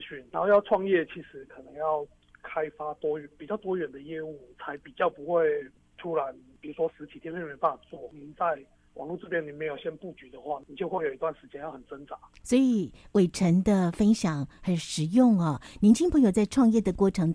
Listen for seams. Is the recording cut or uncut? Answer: uncut